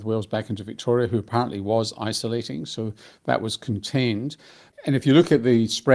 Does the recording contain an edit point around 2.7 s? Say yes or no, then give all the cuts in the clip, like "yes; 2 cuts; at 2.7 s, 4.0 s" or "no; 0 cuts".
no; 0 cuts